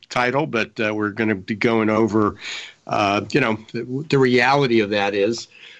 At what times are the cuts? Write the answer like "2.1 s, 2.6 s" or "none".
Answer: none